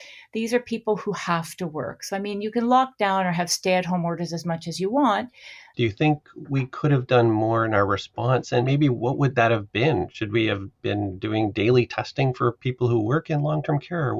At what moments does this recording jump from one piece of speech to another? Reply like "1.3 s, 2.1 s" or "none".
5.7 s